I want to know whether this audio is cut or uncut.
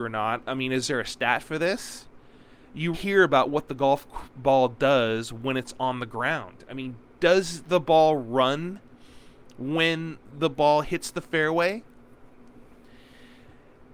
cut